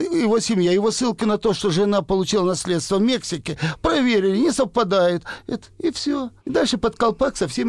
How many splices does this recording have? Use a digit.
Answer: 1